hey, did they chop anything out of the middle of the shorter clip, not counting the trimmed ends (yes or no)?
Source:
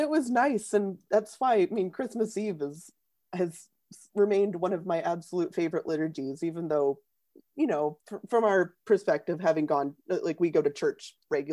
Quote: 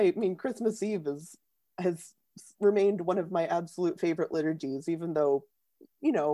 no